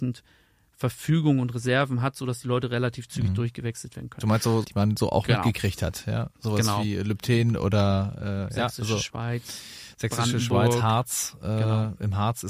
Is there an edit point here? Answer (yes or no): yes